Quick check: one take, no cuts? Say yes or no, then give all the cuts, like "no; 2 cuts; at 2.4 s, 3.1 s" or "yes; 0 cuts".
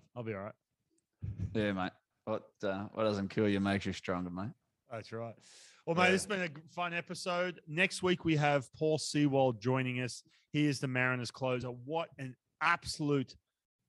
yes; 0 cuts